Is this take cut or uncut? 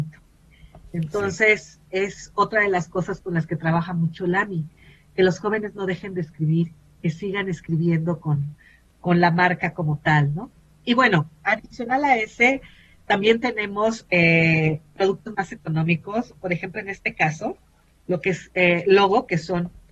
uncut